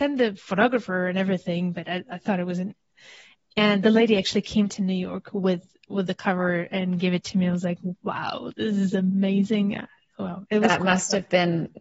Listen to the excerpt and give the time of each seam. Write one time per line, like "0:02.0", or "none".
none